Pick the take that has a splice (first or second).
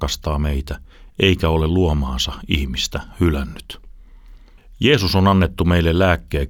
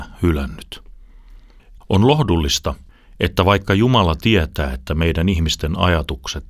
second